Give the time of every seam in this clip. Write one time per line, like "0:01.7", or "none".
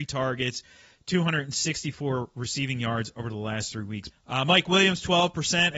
0:04.1